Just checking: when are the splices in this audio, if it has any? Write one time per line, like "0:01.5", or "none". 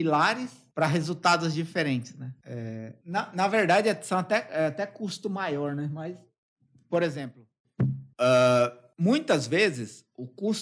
none